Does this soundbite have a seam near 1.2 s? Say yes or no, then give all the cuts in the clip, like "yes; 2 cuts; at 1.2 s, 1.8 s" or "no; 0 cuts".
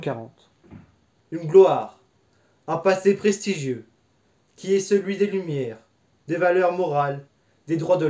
yes; 1 cut; at 1.2 s